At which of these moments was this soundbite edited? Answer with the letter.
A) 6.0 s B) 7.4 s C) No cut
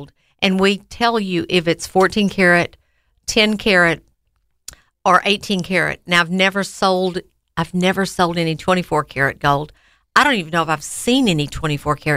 C